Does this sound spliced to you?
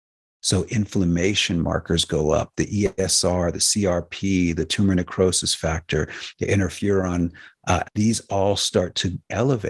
yes; 1 cut; at 7.8 s

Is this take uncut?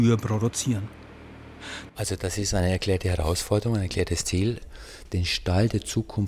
no; 1 cut; at 1.9 s

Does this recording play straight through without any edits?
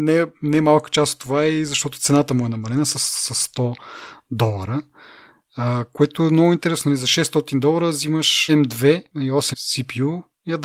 no; 2 cuts; at 8.5 s, 9.5 s

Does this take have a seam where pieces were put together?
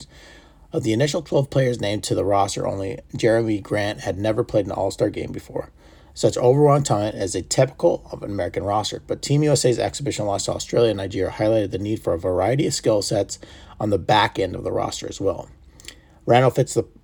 no; 0 cuts

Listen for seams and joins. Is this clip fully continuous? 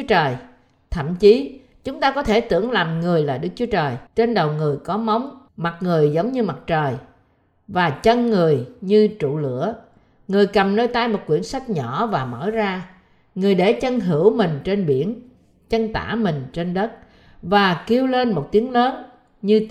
no; 2 cuts; at 4.1 s, 5.5 s

